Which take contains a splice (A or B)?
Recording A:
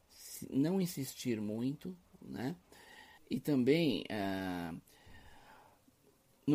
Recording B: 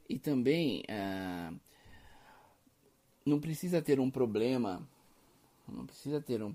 A